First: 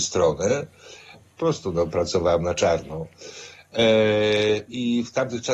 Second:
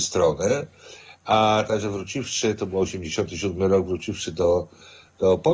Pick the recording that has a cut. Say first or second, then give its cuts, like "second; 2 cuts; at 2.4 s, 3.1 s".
first; 2 cuts; at 1.1 s, 3.6 s